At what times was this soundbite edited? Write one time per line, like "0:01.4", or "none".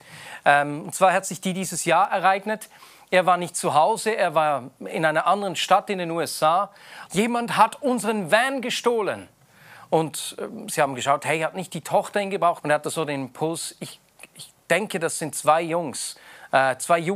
0:07.1
0:12.6